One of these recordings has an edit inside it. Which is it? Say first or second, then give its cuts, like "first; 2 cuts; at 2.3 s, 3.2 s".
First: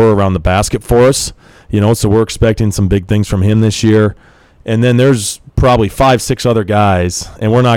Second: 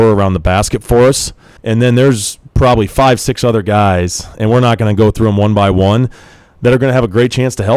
second; 1 cut; at 1.6 s